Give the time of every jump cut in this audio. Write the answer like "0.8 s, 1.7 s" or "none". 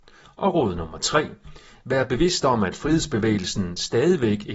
none